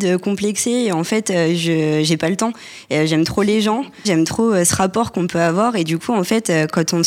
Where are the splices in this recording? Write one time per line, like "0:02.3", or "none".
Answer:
0:04.0